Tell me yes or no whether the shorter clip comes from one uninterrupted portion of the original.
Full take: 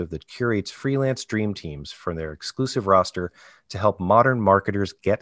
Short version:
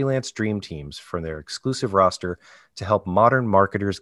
yes